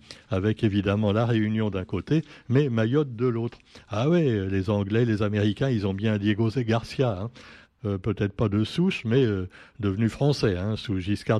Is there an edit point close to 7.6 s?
yes; 1 cut; at 7.6 s

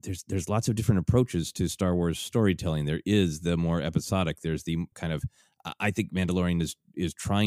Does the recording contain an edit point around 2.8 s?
no; 1 cut; at 4.9 s

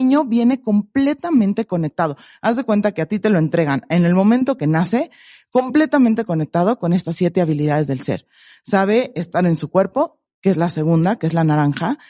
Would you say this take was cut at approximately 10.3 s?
yes; 1 cut; at 10.3 s

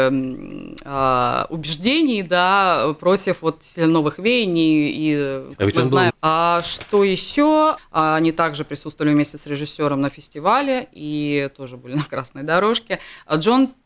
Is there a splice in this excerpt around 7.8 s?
yes; 2 cuts; at 6.1 s, 7.8 s

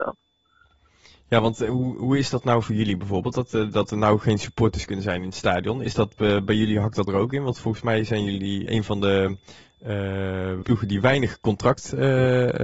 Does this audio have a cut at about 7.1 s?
yes; 3 cuts; at 7.1 s, 8.7 s, 10.6 s

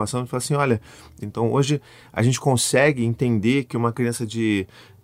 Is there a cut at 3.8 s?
no; 1 cut; at 1.2 s

